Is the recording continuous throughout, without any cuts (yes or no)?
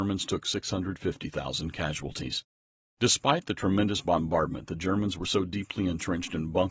yes